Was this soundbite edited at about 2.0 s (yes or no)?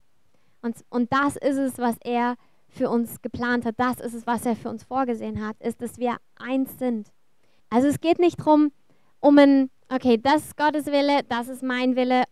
no